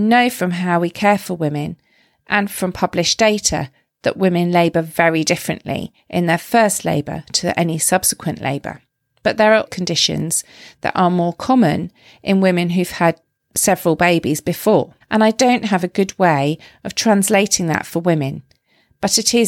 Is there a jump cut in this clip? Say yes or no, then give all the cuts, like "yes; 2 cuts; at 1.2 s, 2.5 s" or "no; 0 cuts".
yes; 2 cuts; at 9.7 s, 15.0 s